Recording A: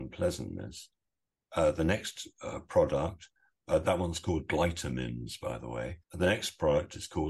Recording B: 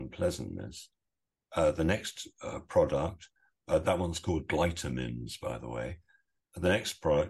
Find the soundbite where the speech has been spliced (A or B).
A